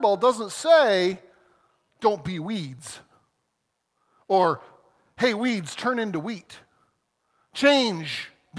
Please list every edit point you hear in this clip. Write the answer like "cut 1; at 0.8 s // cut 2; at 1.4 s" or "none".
none